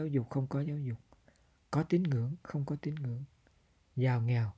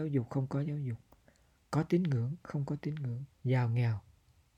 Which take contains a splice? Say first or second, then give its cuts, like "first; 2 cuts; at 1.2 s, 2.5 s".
second; 1 cut; at 3.3 s